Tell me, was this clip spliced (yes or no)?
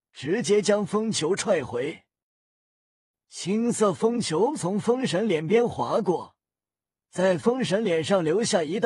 no